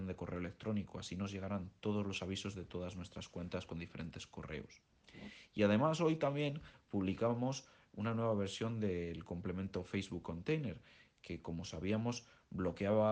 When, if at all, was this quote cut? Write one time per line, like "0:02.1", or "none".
none